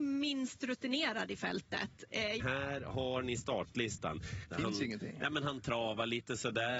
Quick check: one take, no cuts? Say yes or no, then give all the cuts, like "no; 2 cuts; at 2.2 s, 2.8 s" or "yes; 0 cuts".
no; 2 cuts; at 2.4 s, 4.5 s